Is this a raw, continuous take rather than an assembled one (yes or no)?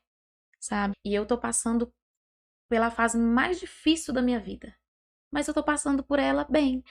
no